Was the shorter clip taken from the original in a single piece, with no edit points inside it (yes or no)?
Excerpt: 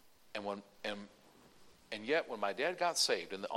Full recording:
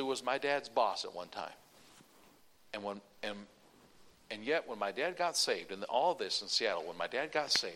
yes